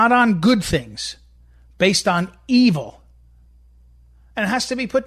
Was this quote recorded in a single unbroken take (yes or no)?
yes